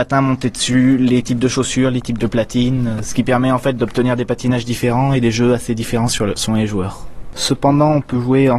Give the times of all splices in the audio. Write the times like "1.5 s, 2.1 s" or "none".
3.0 s, 7.3 s